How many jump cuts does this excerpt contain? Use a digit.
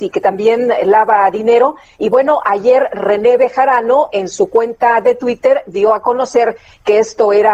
0